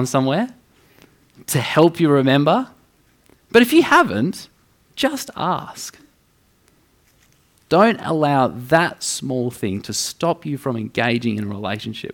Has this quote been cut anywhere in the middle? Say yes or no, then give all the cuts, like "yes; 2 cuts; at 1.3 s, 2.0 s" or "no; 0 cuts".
no; 0 cuts